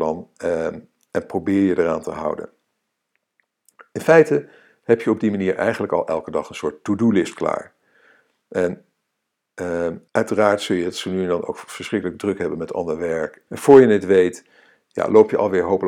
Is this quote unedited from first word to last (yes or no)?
no